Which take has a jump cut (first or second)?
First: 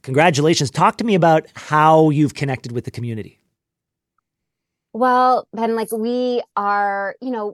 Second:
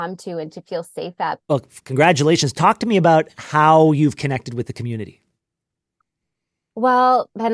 second